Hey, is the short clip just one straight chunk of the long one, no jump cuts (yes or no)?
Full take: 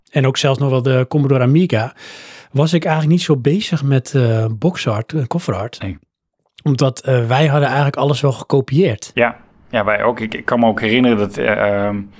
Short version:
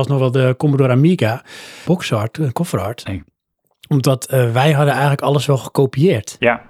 no